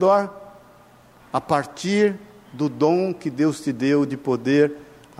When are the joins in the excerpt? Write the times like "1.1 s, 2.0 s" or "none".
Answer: 1.2 s